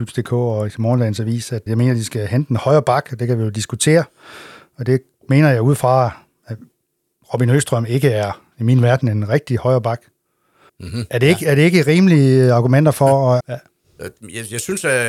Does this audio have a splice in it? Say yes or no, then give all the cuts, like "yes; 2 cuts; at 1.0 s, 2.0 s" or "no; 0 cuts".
yes; 3 cuts; at 1.7 s, 10.7 s, 13.4 s